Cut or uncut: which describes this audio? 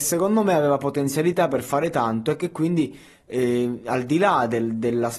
uncut